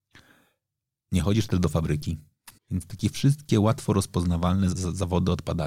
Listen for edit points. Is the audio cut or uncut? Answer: cut